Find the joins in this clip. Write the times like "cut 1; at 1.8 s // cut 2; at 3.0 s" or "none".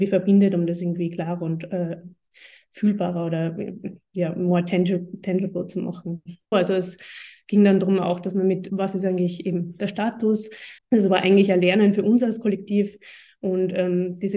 cut 1; at 6.5 s // cut 2; at 8.7 s // cut 3; at 10.8 s